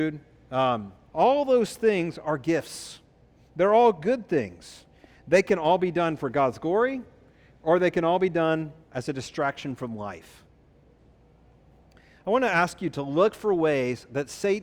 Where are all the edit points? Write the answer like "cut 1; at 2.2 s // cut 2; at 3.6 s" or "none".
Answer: cut 1; at 1.1 s